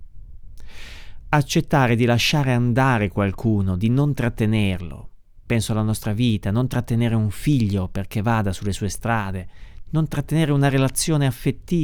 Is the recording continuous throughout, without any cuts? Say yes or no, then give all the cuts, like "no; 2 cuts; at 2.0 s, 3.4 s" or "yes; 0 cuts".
yes; 0 cuts